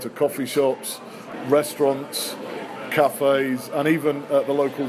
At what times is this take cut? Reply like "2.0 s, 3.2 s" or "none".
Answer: none